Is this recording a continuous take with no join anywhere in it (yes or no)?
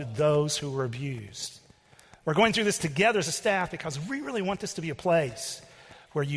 yes